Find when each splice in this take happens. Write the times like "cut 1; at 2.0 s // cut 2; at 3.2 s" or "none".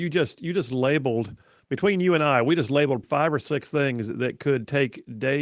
cut 1; at 3.0 s